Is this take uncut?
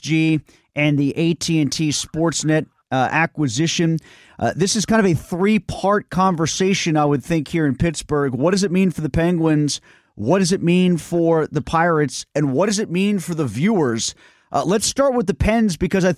yes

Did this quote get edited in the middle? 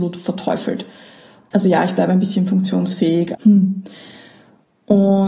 yes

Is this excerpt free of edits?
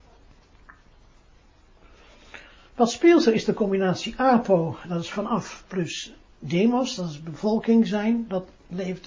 yes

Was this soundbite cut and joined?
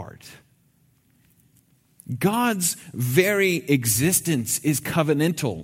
no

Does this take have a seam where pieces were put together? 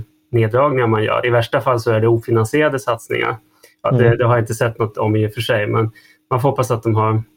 no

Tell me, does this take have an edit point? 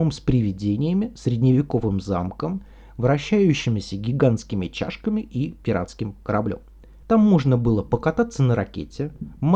yes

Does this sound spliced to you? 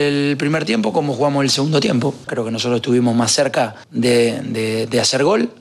yes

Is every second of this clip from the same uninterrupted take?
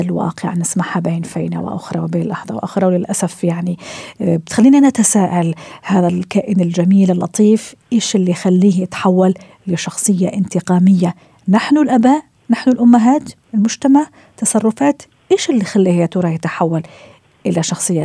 yes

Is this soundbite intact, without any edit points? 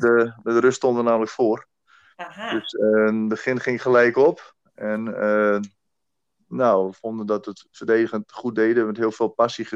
yes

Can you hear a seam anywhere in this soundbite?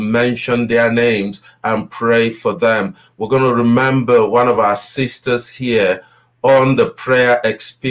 no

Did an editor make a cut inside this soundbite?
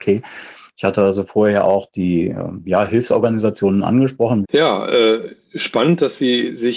yes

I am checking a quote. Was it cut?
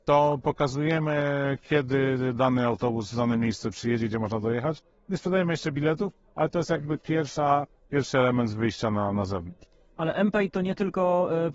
no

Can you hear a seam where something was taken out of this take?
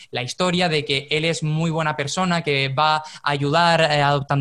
no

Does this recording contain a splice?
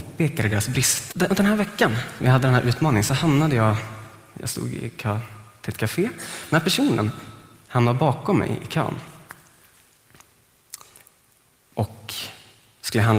yes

